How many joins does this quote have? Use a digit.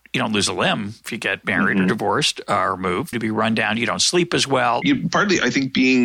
2